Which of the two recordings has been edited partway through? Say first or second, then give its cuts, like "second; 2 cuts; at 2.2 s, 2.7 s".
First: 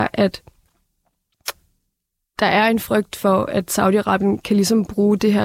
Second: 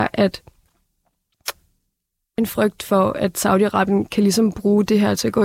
second; 1 cut; at 2.4 s